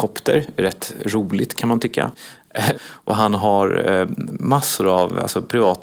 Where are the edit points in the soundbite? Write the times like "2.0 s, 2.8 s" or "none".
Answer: 2.7 s